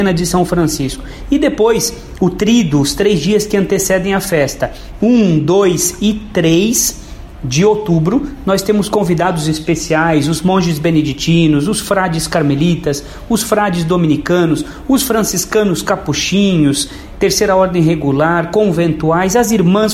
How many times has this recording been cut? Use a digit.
0